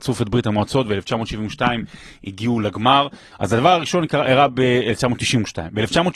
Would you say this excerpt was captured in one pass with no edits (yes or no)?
no